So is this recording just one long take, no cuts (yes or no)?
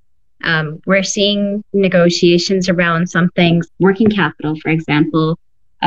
no